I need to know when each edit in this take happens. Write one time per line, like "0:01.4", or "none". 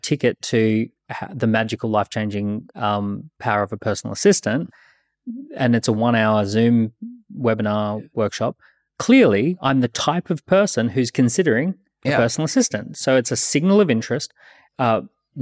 none